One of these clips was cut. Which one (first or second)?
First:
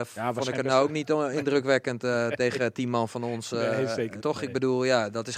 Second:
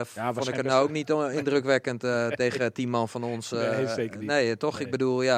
first